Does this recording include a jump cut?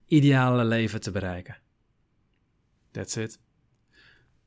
no; 0 cuts

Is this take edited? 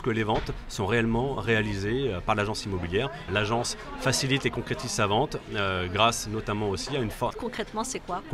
yes; 2 cuts; at 3.3 s, 7.3 s

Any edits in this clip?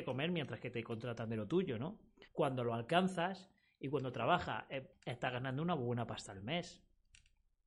yes; 2 cuts; at 2.3 s, 4.9 s

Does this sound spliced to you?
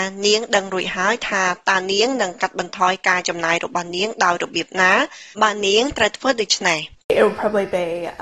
yes; 1 cut; at 5.3 s

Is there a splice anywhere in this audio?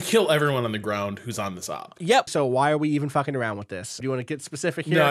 yes; 2 cuts; at 2.3 s, 4.0 s

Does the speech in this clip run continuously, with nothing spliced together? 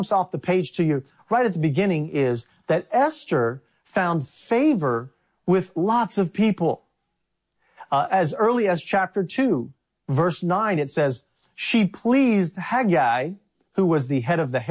yes; 0 cuts

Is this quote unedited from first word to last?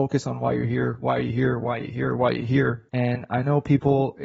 no; 1 cut; at 2.9 s

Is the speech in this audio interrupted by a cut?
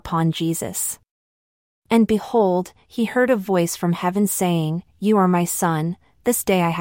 no; 0 cuts

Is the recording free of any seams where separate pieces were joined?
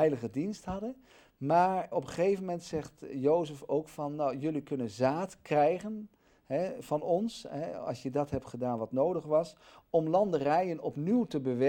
no; 2 cuts; at 1.9 s, 6.8 s

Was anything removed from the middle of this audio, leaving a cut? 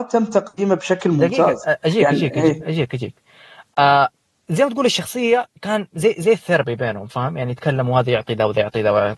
no; 0 cuts

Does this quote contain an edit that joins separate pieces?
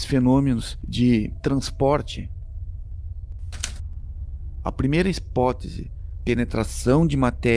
yes; 2 cuts; at 4.6 s, 6.2 s

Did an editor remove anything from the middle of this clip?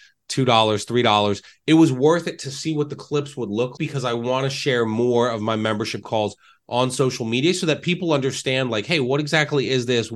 yes; 1 cut; at 3.8 s

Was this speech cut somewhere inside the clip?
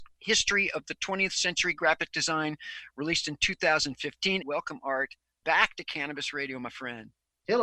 yes; 1 cut; at 4.4 s

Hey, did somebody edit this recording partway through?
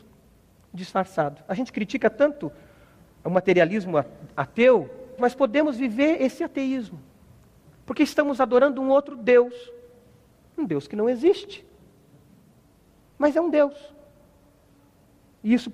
yes; 1 cut; at 5.2 s

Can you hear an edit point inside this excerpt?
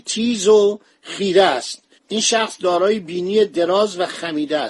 yes; 1 cut; at 2.0 s

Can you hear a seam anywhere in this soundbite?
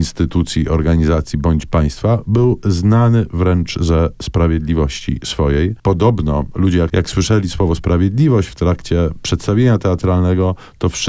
no; 0 cuts

